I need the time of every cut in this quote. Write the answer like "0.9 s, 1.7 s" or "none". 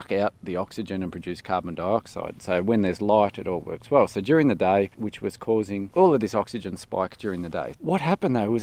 4.9 s, 7.7 s